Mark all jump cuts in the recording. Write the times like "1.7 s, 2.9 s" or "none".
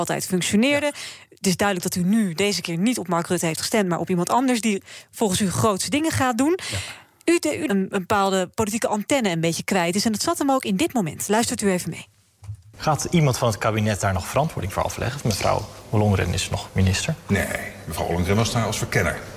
7.7 s